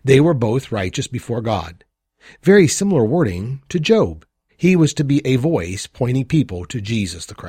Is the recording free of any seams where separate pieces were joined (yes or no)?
no